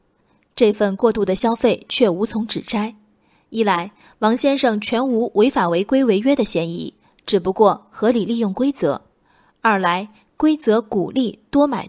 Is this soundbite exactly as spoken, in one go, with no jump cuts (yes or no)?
yes